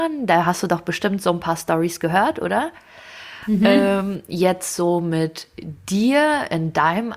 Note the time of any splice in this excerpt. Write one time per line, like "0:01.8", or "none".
none